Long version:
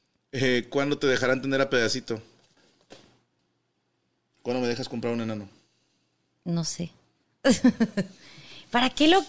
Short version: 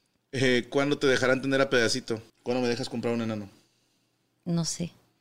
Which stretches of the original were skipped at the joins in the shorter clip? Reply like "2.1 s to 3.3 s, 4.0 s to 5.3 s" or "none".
2.3 s to 4.3 s